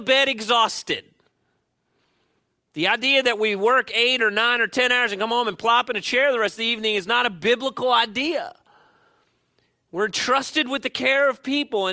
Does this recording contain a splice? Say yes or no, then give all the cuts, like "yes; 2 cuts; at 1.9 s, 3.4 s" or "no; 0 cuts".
no; 0 cuts